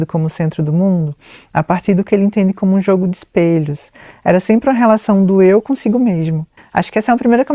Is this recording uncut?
no; 1 cut; at 6.6 s

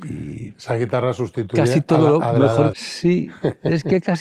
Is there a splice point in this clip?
yes; 1 cut; at 2.7 s

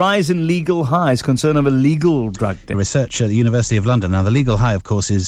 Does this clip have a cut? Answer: yes; 1 cut; at 2.7 s

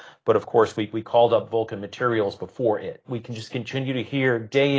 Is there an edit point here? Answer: yes; 1 cut; at 3.0 s

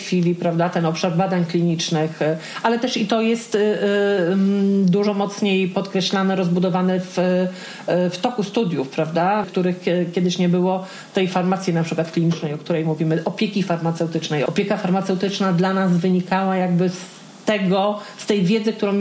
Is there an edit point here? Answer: yes; 2 cuts; at 9.4 s, 14.5 s

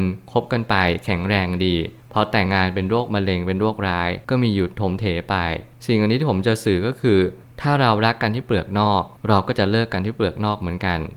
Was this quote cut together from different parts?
yes; 1 cut; at 2.5 s

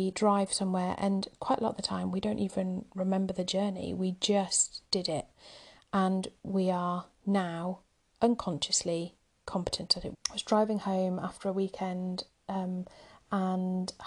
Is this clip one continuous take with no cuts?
no; 1 cut; at 10.1 s

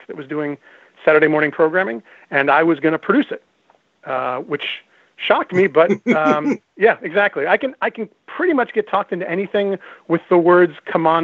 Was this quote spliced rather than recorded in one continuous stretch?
yes; 1 cut; at 6.6 s

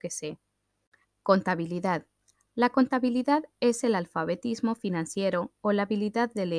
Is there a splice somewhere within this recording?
yes; 1 cut; at 1.0 s

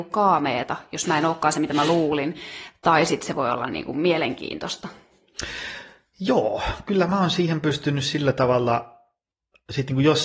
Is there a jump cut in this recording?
no; 0 cuts

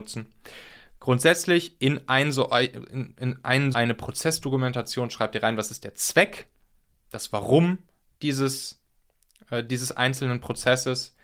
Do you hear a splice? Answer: yes; 1 cut; at 3.7 s

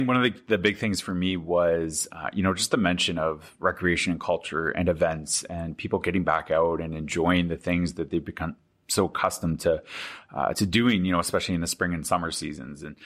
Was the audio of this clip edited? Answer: no; 0 cuts

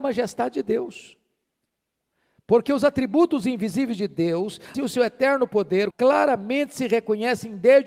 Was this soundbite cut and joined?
yes; 2 cuts; at 4.7 s, 5.9 s

